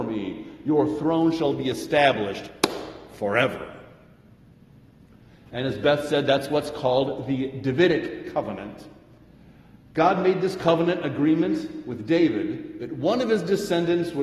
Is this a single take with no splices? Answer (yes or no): yes